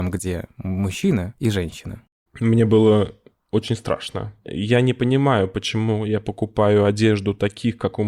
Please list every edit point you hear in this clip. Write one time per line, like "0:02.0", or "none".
0:02.3
0:04.4